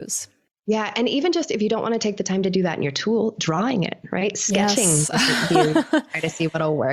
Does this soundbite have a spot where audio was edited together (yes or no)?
no